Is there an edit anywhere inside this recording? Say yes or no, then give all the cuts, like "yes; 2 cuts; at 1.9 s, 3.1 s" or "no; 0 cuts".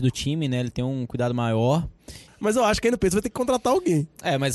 yes; 1 cut; at 2.3 s